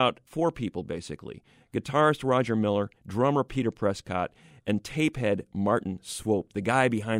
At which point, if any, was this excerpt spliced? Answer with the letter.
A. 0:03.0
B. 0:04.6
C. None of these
A